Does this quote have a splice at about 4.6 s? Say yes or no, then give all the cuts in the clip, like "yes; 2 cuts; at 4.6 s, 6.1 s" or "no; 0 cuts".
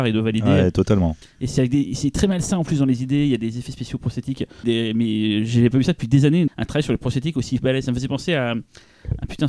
yes; 2 cuts; at 4.6 s, 6.5 s